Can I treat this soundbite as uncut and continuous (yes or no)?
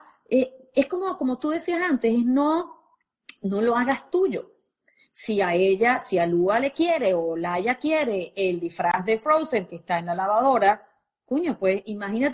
yes